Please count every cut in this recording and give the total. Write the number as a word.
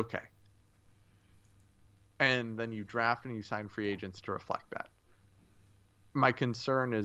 zero